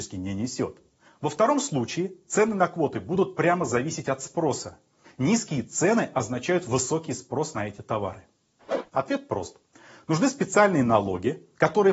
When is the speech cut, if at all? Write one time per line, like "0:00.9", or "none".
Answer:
0:01.1
0:05.0
0:08.9